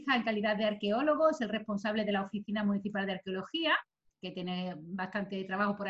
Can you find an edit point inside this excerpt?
no; 0 cuts

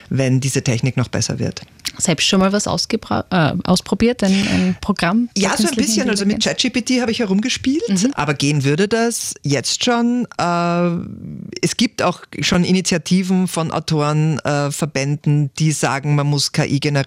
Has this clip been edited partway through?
yes; 1 cut; at 8.1 s

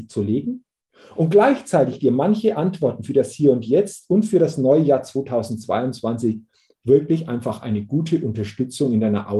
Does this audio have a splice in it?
no; 0 cuts

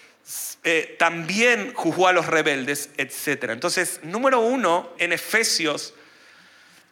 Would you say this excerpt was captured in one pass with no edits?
no; 1 cut; at 5.0 s

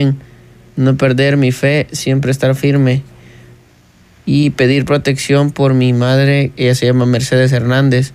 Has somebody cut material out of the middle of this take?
no; 0 cuts

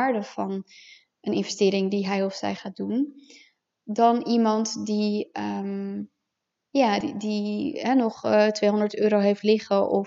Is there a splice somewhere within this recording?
no; 0 cuts

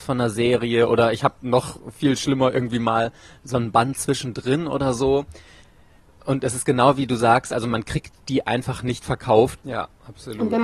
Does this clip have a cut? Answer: yes; 1 cut; at 9.6 s

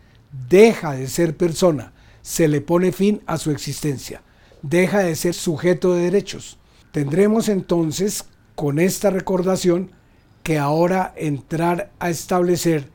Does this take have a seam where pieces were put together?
yes; 2 cuts; at 5.3 s, 6.8 s

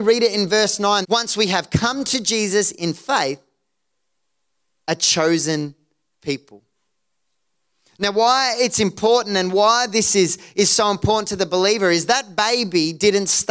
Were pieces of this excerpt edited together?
yes; 1 cut; at 1.0 s

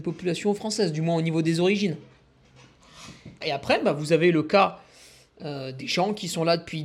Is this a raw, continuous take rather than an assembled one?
no; 1 cut; at 3.4 s

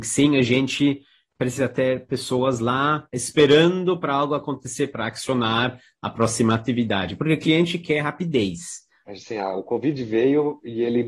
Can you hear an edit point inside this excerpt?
yes; 1 cut; at 9.0 s

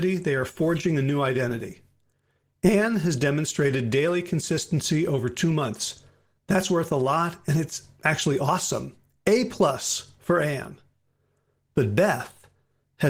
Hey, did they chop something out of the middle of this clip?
no; 0 cuts

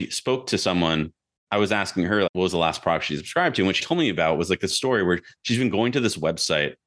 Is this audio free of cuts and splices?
no; 2 cuts; at 2.3 s, 3.8 s

